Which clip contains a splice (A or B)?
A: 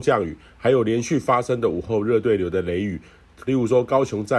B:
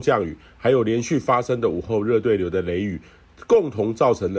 A